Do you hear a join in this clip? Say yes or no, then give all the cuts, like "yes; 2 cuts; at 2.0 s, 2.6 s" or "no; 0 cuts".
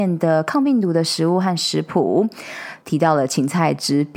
yes; 1 cut; at 2.8 s